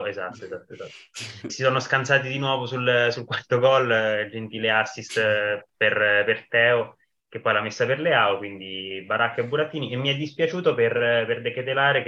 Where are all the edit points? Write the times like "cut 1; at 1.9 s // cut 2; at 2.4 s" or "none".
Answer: cut 1; at 1.5 s